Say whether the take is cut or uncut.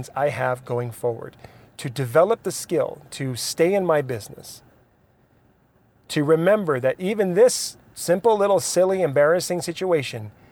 uncut